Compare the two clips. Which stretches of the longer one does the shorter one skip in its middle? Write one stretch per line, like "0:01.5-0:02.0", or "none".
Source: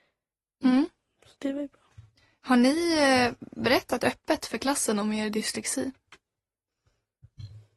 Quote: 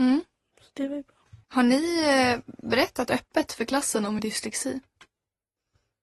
0:02.1-0:02.4
0:05.1-0:05.3

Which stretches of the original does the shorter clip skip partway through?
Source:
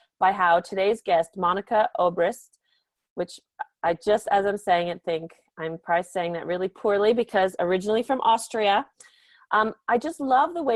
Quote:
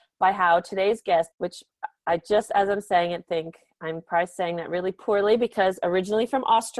0:01.3-0:03.1

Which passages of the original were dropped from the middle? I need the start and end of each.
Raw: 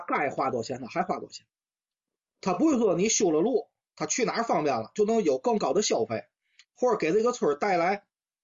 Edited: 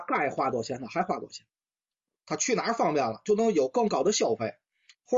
0:02.2-0:03.9

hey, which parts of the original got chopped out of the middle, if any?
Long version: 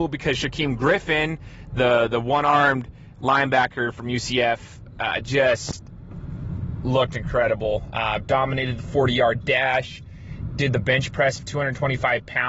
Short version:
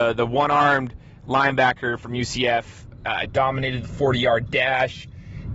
0:05.2-0:08.2

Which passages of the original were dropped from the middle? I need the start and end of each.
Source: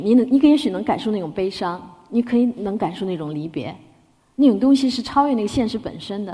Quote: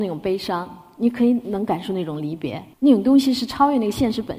0:03.9-0:04.3

